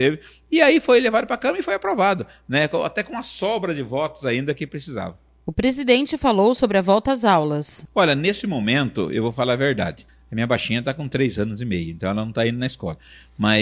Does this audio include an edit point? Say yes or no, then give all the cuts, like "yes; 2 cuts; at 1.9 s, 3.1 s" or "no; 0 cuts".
no; 0 cuts